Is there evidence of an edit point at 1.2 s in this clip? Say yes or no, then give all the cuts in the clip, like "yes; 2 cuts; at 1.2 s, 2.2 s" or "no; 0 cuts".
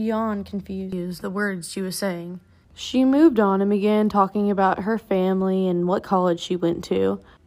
yes; 1 cut; at 1.2 s